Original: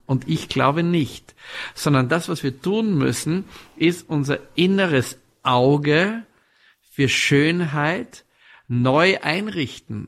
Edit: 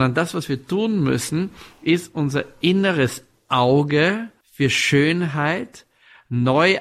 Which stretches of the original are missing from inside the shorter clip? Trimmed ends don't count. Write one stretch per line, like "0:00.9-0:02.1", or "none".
0:06.3-0:06.8